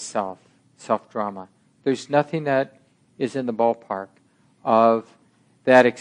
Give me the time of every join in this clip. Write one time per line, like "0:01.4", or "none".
none